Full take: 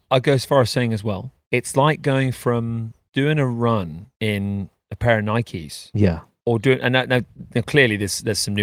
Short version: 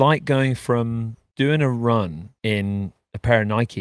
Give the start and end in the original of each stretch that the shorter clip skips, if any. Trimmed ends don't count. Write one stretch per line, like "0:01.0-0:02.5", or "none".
none